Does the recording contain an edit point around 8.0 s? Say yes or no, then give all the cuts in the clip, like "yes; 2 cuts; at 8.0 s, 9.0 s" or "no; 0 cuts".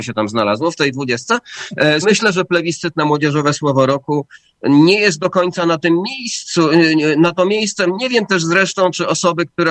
no; 1 cut; at 2.0 s